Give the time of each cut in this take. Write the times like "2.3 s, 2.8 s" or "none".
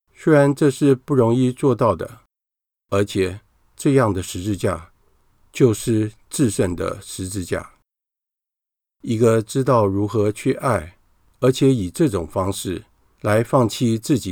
none